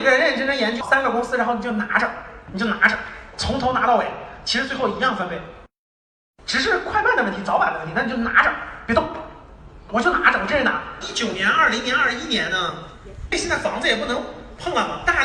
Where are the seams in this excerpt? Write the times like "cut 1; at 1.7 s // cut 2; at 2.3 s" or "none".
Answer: cut 1; at 11.0 s